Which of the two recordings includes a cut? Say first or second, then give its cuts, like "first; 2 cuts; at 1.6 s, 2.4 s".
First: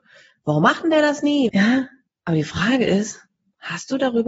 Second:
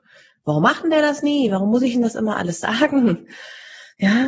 first; 1 cut; at 1.5 s